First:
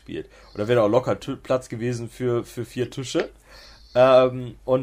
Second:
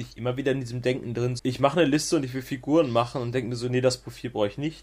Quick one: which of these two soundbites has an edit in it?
second; 1 cut; at 1.4 s

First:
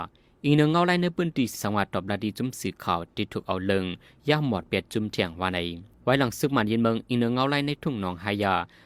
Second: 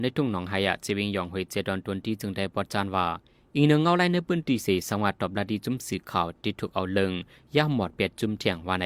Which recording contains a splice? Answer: first; 2 cuts; at 1.5 s, 5.9 s

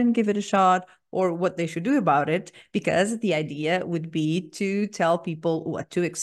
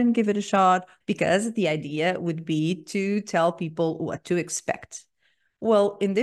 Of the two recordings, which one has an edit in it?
second; 1 cut; at 1.0 s

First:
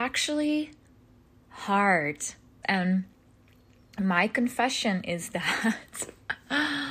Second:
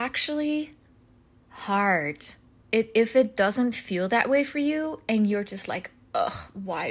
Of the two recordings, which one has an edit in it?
first; 1 cut; at 2.6 s

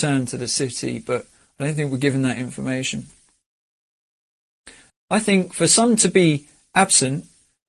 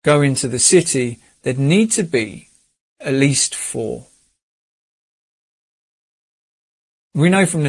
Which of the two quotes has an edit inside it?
first; 1 cut; at 4.9 s

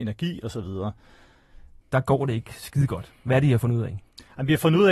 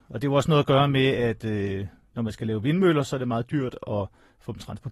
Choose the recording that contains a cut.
first; 1 cut; at 1.8 s

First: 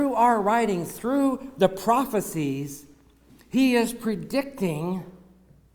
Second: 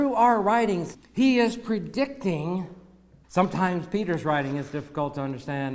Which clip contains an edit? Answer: second; 2 cuts; at 0.9 s, 3.2 s

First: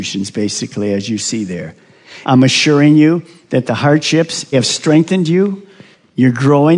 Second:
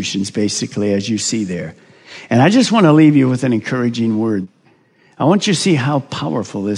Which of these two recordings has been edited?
first; 2 cuts; at 2.2 s, 4.5 s

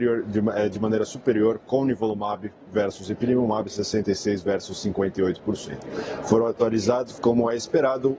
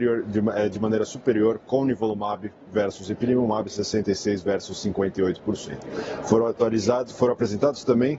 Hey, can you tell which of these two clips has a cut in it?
first; 1 cut; at 7.2 s

